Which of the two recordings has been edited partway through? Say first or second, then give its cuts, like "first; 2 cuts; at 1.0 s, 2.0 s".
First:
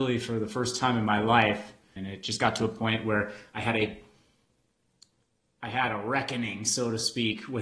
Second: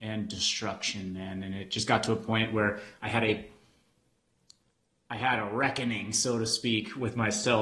first; 1 cut; at 2.0 s